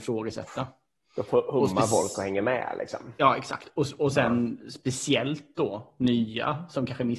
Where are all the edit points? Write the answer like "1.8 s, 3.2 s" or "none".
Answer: none